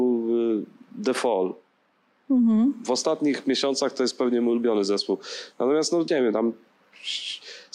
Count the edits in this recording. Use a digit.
1